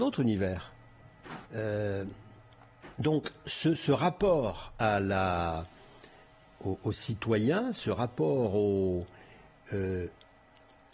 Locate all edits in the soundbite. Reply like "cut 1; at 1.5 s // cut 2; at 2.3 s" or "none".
cut 1; at 1.5 s